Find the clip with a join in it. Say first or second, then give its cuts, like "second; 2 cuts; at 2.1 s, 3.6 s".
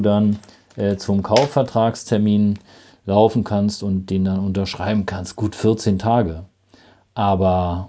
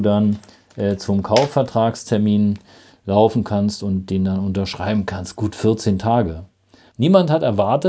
second; 1 cut; at 6.9 s